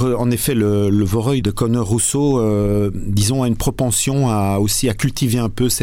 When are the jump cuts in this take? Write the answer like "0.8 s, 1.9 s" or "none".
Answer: none